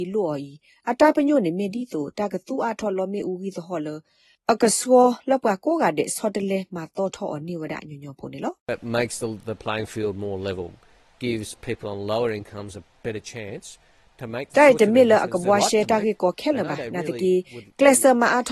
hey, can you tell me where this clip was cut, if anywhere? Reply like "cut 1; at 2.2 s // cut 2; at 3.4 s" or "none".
none